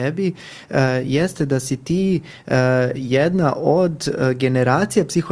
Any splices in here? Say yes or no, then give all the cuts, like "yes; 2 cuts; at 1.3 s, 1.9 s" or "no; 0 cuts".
no; 0 cuts